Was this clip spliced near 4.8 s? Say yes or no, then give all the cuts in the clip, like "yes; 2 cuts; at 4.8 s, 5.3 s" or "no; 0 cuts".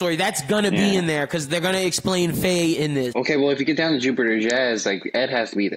no; 1 cut; at 3.1 s